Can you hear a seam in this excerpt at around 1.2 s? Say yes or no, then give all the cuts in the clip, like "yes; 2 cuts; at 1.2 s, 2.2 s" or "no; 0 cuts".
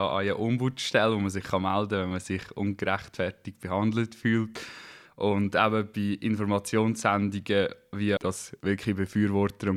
no; 2 cuts; at 5.1 s, 8.2 s